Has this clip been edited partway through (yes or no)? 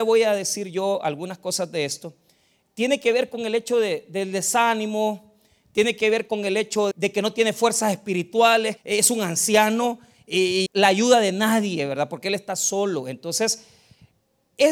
yes